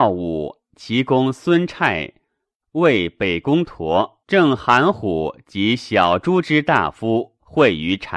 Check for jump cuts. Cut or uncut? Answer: cut